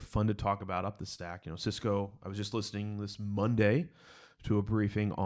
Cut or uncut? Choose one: uncut